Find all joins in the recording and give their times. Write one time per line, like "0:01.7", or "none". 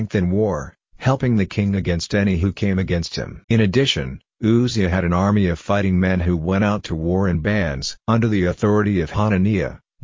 0:03.4
0:08.0